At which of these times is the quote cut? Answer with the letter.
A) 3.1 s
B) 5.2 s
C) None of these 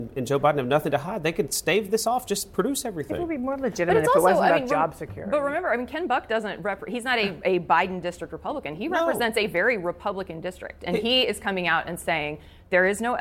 C